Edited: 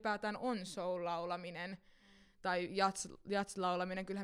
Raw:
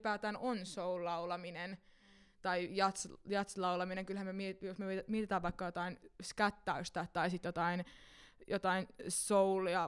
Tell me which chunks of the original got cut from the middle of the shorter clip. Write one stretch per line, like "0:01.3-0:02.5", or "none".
none